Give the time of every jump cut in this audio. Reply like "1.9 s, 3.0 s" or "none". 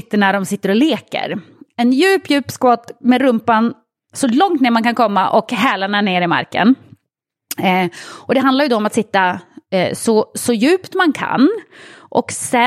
none